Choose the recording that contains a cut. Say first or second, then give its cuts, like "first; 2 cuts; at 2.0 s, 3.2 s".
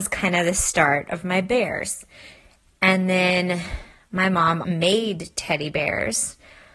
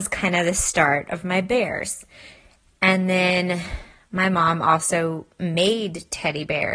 first; 1 cut; at 4.6 s